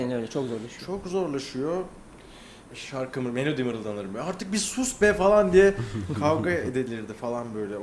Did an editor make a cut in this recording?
yes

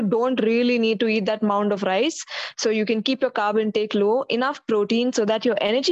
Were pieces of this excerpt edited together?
no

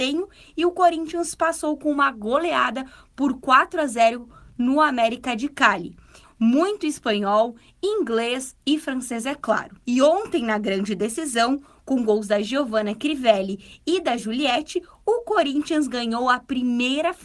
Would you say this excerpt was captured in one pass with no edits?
no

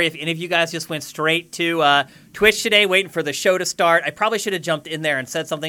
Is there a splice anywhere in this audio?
no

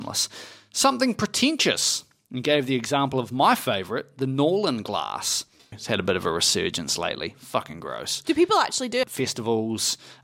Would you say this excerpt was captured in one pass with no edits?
no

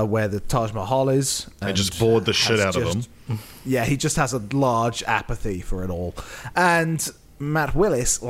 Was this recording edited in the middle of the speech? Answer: no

